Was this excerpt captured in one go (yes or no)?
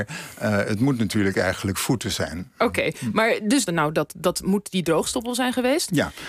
no